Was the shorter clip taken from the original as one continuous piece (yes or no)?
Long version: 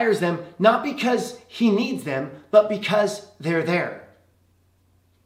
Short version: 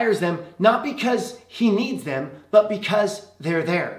yes